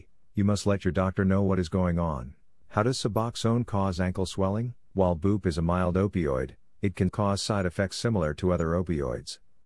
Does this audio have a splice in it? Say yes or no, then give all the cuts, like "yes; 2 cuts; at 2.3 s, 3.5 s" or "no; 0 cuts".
yes; 3 cuts; at 2.6 s, 4.9 s, 7.1 s